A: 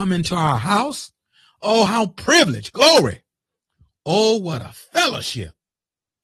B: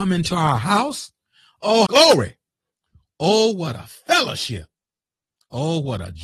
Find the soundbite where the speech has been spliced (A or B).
B